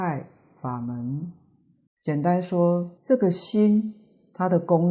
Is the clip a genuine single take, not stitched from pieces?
no; 2 cuts; at 1.9 s, 3.0 s

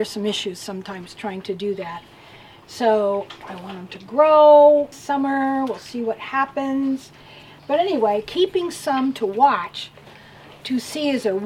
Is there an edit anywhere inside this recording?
yes; 2 cuts; at 4.9 s, 7.6 s

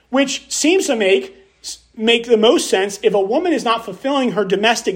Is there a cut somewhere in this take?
no; 0 cuts

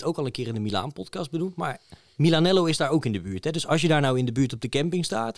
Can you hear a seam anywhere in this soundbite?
no; 0 cuts

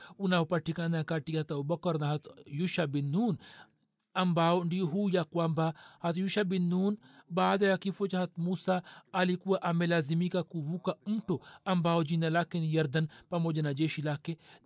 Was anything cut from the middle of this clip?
no; 0 cuts

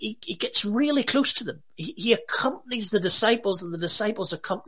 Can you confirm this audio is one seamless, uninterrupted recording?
yes; 0 cuts

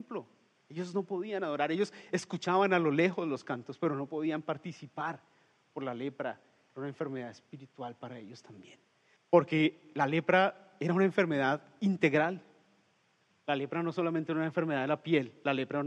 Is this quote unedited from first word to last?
no; 1 cut; at 9.2 s

